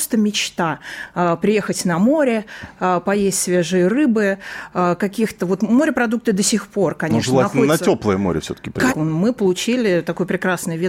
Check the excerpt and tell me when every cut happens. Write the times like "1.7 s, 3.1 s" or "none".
8.9 s